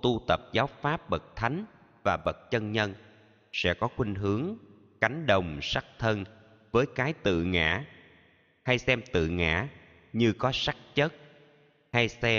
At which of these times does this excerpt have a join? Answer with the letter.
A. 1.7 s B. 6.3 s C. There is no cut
C